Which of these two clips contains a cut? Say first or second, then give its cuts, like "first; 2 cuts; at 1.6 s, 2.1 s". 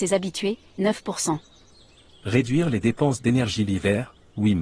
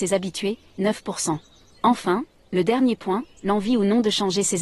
second; 2 cuts; at 1.8 s, 3.4 s